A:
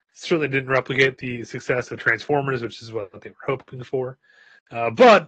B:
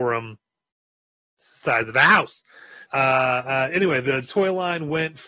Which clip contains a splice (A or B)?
B